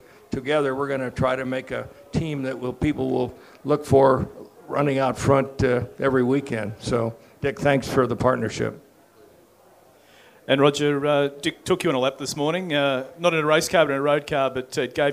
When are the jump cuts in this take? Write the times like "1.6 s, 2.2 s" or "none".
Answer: none